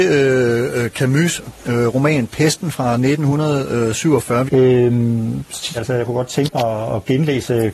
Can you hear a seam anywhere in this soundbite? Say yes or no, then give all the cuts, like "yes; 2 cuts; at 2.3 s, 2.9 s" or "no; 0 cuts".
yes; 2 cuts; at 4.5 s, 5.7 s